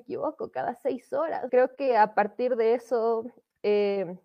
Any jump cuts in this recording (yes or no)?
yes